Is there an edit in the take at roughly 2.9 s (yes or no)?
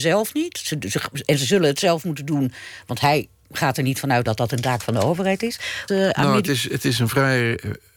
no